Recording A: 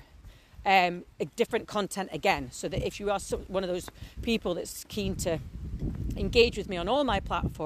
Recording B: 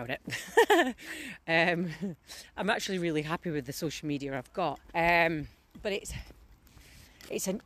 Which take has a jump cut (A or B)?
B